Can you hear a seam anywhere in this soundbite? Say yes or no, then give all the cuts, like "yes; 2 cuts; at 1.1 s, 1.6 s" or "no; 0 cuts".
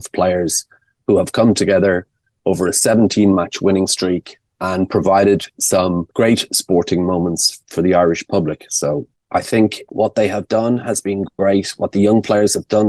no; 0 cuts